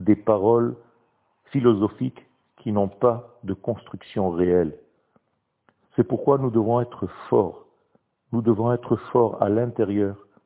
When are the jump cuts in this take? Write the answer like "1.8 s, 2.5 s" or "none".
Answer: none